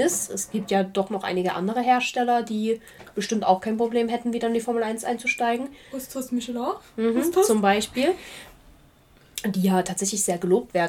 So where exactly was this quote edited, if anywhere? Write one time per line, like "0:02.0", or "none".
none